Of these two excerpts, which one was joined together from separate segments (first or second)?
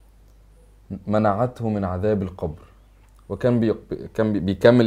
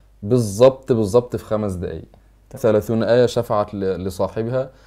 second